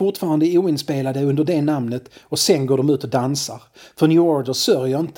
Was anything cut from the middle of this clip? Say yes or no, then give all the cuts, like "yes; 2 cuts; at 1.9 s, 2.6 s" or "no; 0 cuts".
no; 0 cuts